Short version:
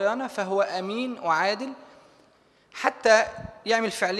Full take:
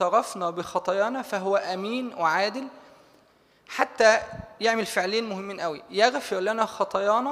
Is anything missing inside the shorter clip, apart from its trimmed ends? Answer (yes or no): no